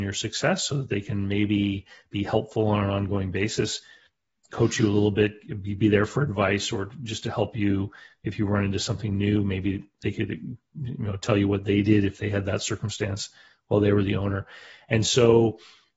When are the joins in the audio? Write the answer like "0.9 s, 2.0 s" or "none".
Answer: none